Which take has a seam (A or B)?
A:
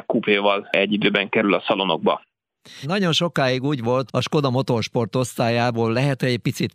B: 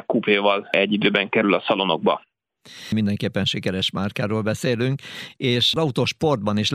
A